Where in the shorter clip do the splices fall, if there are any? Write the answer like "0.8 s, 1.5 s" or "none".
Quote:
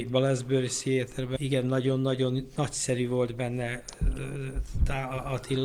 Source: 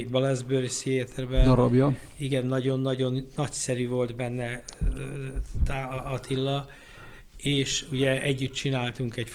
1.4 s